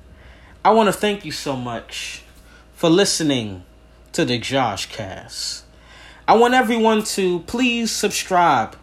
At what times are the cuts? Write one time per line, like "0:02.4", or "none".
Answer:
none